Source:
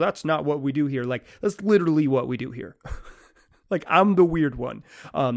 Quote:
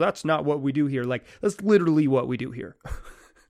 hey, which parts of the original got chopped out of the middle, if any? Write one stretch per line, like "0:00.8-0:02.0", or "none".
none